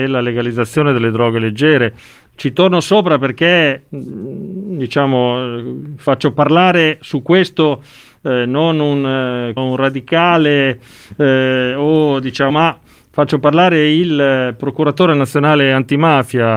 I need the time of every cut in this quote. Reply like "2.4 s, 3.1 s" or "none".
9.6 s, 12.5 s